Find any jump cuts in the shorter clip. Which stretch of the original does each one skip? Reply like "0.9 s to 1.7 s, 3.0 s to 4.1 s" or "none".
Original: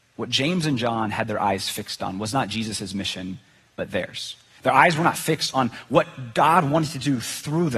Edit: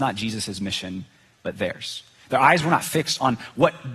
none